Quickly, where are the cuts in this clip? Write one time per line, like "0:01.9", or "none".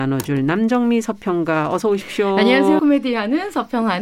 0:02.8